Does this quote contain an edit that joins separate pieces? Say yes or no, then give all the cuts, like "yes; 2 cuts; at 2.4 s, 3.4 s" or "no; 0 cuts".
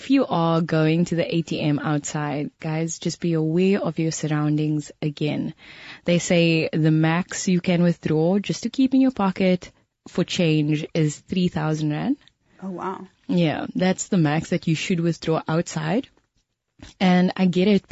no; 0 cuts